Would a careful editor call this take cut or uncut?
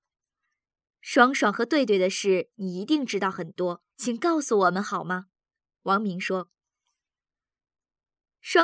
cut